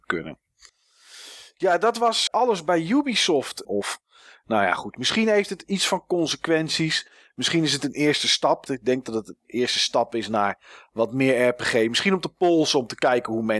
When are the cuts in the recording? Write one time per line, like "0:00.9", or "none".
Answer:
0:02.3
0:03.6
0:08.7